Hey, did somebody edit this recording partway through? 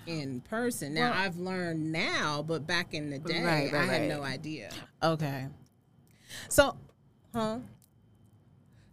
yes; 1 cut; at 4.9 s

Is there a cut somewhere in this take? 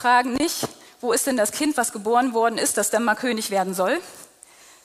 no; 0 cuts

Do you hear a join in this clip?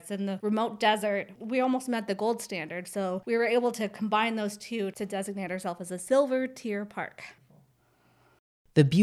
yes; 1 cut; at 1.4 s

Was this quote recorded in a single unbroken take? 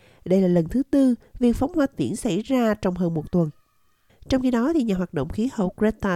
no; 1 cut; at 4.1 s

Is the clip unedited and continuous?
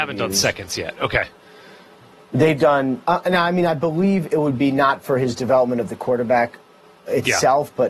no; 1 cut; at 3.0 s

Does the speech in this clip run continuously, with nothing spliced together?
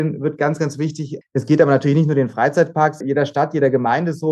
no; 2 cuts; at 1.2 s, 3.0 s

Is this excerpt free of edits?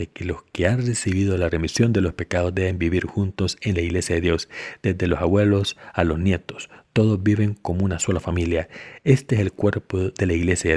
yes; 0 cuts

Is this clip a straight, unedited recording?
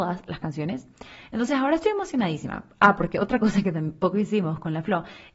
yes; 0 cuts

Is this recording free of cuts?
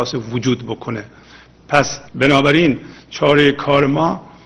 no; 1 cut; at 2.1 s

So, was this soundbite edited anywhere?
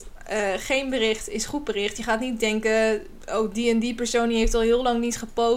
no; 0 cuts

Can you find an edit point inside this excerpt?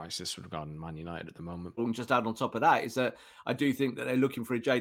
yes; 1 cut; at 1.8 s

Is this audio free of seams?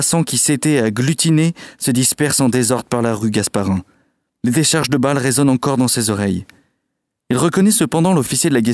no; 2 cuts; at 4.3 s, 7.2 s

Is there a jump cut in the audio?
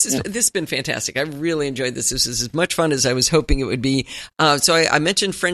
no; 0 cuts

